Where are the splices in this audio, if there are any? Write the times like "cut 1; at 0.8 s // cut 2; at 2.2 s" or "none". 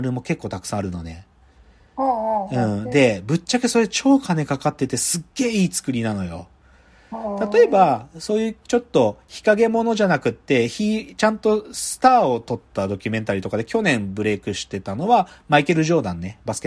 none